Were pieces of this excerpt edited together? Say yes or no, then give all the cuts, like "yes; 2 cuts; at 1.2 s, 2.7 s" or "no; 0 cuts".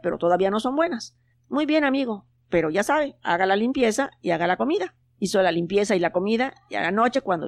yes; 2 cuts; at 1.3 s, 5.0 s